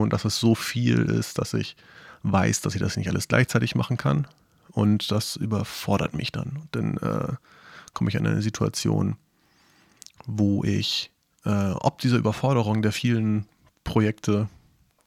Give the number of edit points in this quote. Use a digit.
0